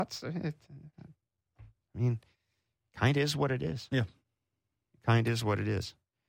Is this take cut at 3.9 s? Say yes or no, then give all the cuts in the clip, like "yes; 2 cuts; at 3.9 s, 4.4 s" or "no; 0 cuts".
no; 0 cuts